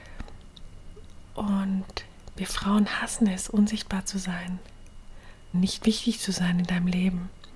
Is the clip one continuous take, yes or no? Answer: no